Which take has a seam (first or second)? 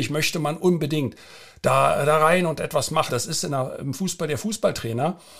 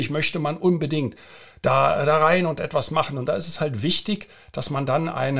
first